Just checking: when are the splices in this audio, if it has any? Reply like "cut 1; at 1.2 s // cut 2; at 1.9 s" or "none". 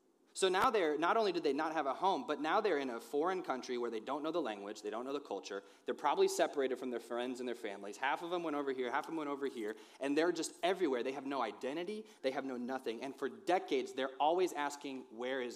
cut 1; at 12.2 s